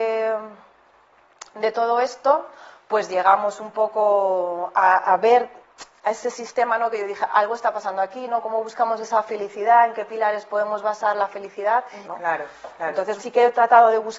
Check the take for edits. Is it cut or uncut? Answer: cut